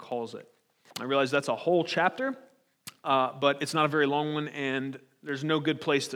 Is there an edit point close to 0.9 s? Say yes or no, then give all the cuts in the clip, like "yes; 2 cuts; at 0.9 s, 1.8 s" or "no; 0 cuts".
yes; 1 cut; at 0.9 s